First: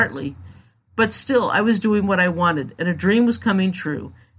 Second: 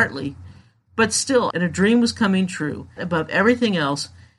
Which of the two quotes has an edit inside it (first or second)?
second